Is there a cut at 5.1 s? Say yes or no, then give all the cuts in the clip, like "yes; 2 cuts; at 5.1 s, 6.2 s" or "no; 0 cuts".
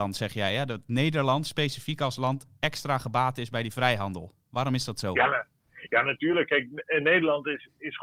no; 0 cuts